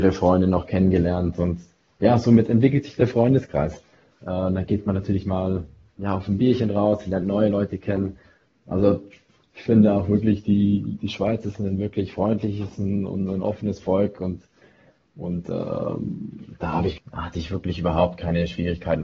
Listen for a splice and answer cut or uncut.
cut